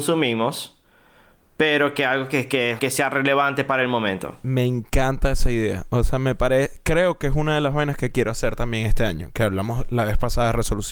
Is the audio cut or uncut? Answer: cut